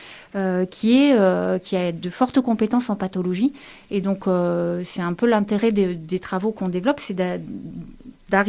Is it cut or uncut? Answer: uncut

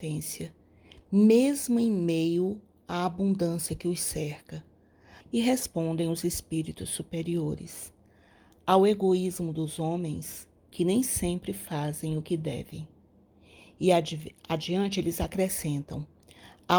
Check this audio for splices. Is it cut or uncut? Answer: cut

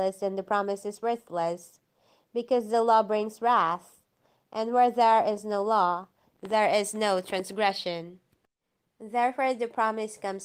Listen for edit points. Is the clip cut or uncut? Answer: uncut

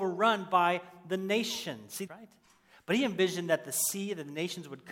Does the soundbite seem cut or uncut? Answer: cut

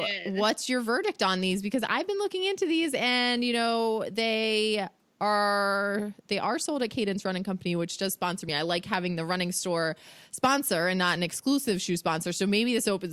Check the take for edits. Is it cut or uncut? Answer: uncut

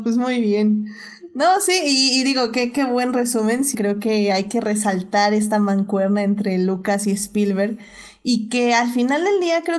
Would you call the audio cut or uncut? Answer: cut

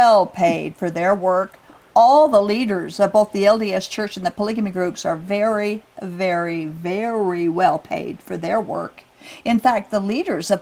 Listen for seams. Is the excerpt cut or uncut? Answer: uncut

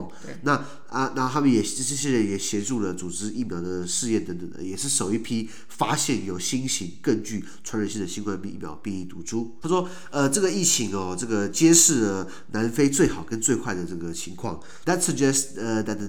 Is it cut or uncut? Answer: cut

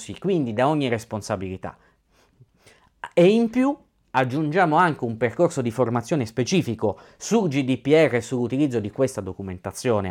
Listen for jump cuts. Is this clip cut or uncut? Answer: uncut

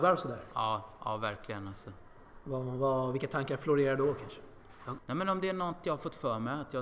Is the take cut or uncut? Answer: cut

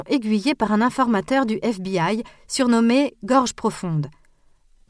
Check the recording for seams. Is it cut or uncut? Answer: uncut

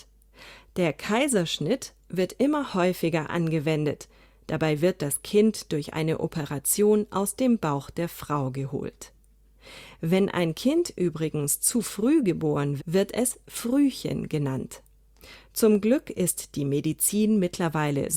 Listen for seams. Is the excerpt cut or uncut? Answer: cut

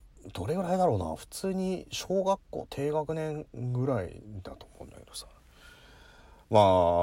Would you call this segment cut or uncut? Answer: uncut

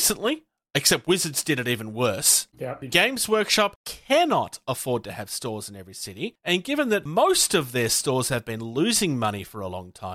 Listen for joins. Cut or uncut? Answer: cut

